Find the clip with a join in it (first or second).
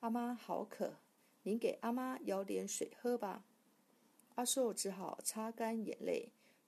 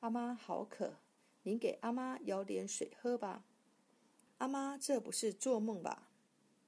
second